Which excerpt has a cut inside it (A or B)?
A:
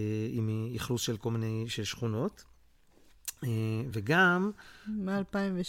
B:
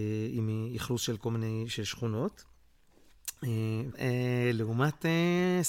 B